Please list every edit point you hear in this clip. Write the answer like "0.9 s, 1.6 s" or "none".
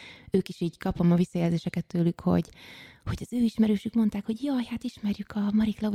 none